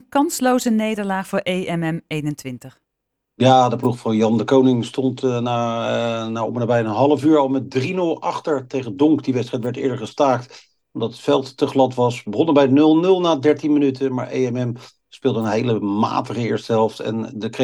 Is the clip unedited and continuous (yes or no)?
yes